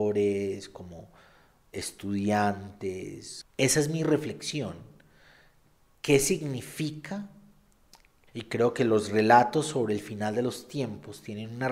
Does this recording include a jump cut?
yes; 1 cut; at 8.3 s

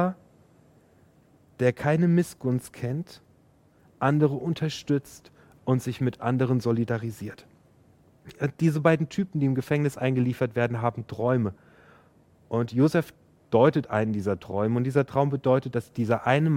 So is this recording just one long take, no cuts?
yes; 0 cuts

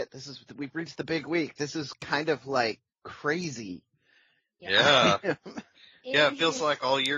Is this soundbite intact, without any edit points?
yes; 0 cuts

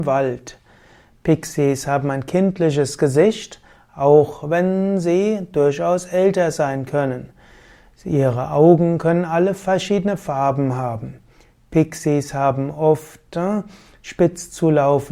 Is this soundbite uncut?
no; 1 cut; at 1.1 s

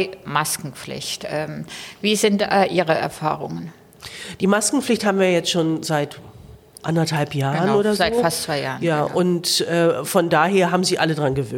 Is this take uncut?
yes; 0 cuts

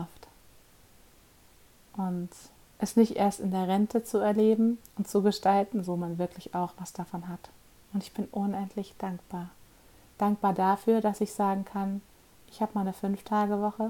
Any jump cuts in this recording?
yes; 2 cuts; at 5.8 s, 7.8 s

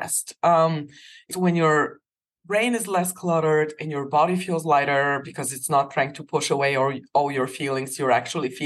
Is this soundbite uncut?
no; 1 cut; at 1.3 s

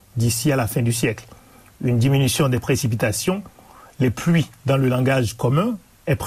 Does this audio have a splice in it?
no; 0 cuts

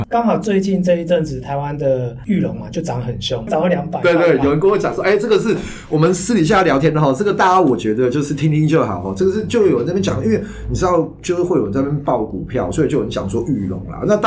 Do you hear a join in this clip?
yes; 1 cut; at 3.5 s

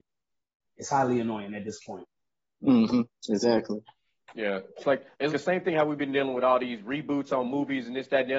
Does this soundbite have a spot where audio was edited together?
yes; 1 cut; at 5.3 s

